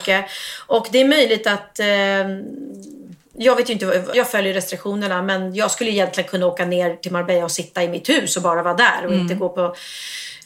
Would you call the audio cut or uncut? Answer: cut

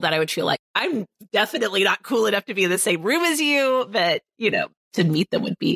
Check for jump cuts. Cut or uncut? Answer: uncut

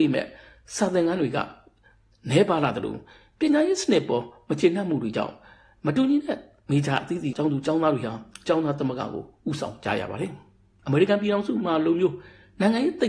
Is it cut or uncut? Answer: cut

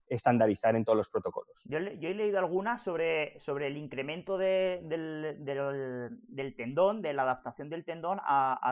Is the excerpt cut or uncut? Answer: uncut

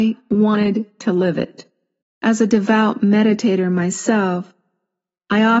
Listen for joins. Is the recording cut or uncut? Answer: cut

